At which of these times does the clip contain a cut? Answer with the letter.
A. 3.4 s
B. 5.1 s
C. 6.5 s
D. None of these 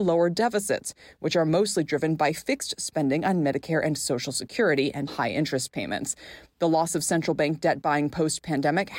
B